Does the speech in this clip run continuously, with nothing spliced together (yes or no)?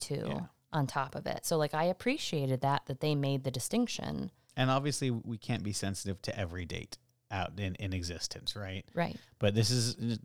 yes